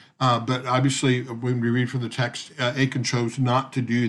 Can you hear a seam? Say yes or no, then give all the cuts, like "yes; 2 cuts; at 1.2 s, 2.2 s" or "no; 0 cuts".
no; 0 cuts